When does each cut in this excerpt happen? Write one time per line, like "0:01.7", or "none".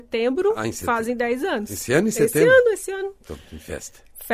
none